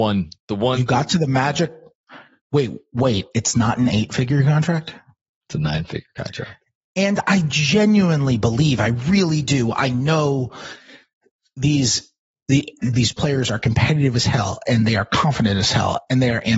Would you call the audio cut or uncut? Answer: uncut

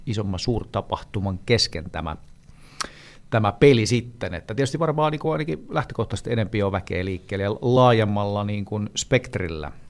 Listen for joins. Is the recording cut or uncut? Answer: uncut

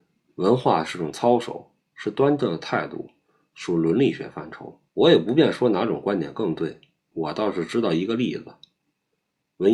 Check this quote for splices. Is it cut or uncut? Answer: cut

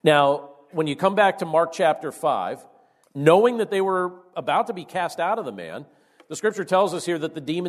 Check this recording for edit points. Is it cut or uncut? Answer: cut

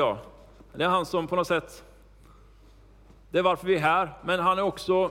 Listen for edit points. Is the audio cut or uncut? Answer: uncut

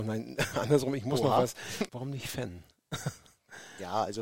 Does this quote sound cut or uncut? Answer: cut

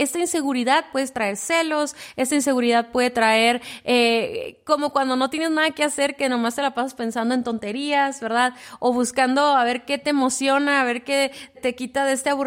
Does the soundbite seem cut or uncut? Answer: cut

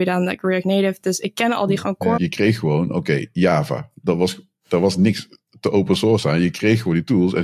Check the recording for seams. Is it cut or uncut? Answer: cut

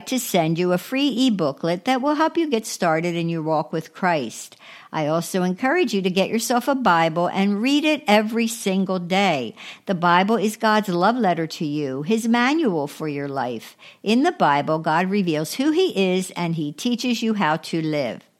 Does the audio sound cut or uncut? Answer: uncut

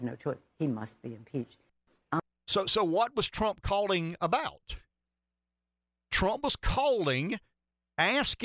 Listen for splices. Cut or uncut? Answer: uncut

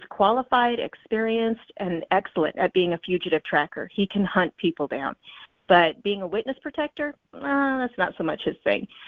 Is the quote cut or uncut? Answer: uncut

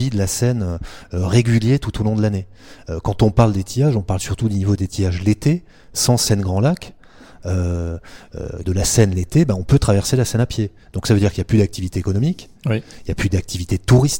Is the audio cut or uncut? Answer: cut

